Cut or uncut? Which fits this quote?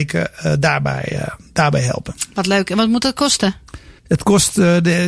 cut